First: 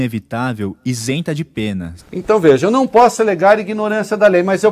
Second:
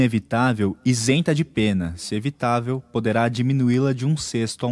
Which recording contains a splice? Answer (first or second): first